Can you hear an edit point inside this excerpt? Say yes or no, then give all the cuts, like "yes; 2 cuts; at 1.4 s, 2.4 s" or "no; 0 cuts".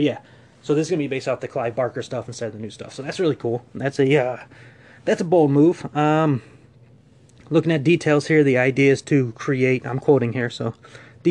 no; 0 cuts